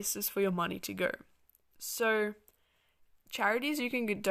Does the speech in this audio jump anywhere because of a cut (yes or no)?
no